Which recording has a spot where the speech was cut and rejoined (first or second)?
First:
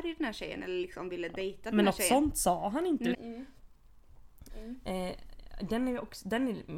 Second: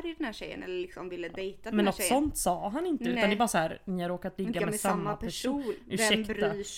first